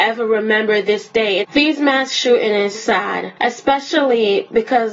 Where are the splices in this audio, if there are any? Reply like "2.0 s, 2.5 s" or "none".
1.4 s, 2.7 s